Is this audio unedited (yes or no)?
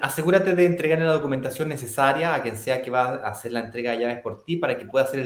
yes